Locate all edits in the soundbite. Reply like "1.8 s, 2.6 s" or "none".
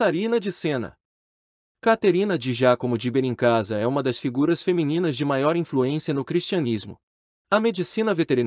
7.3 s